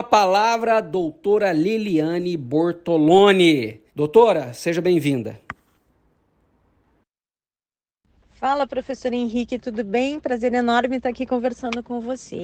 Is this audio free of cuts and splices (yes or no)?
no